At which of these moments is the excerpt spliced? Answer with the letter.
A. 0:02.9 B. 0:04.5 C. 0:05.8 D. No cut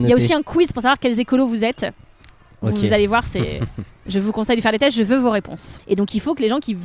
C